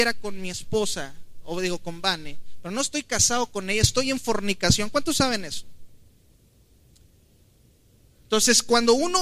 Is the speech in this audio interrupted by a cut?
no; 0 cuts

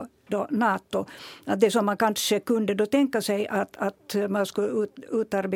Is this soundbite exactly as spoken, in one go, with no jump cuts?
yes; 0 cuts

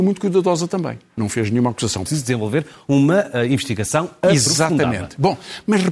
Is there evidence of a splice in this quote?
yes; 1 cut; at 2.1 s

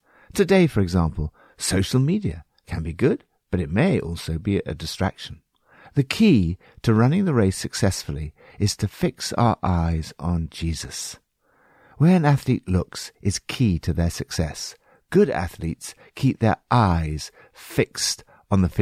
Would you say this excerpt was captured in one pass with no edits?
yes; 0 cuts

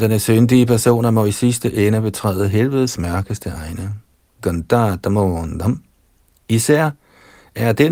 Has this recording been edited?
no; 0 cuts

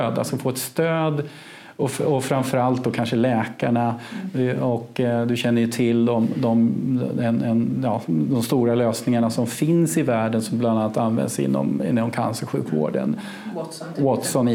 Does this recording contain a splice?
no; 0 cuts

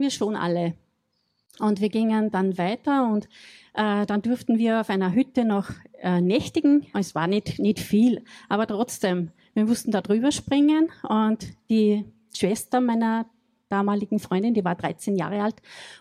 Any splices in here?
yes; 1 cut; at 6.9 s

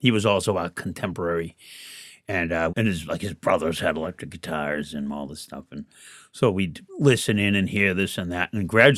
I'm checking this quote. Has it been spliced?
yes; 2 cuts; at 2.7 s, 6.9 s

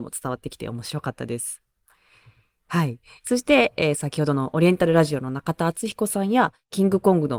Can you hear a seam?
no; 0 cuts

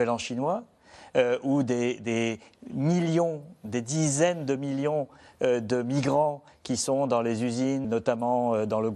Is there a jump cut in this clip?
yes; 1 cut; at 7.8 s

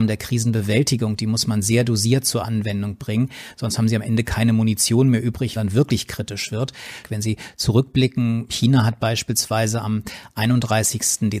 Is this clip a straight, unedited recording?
no; 2 cuts; at 5.6 s, 7.0 s

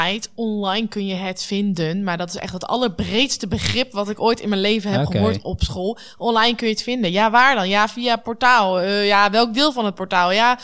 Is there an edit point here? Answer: no; 0 cuts

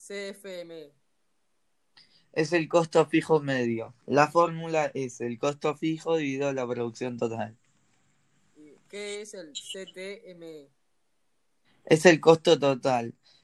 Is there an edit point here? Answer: yes; 1 cut; at 4.0 s

